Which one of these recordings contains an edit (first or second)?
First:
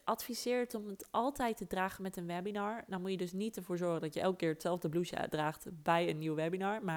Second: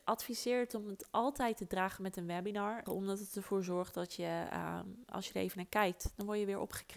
second